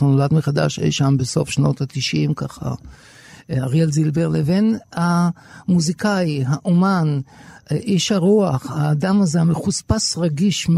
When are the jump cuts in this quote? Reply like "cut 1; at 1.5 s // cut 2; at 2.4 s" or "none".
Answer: none